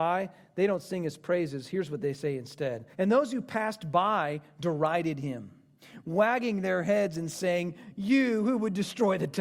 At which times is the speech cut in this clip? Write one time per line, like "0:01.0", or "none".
0:02.9